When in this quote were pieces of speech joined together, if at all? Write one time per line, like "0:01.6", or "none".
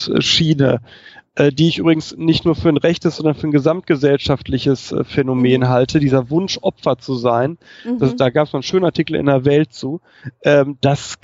none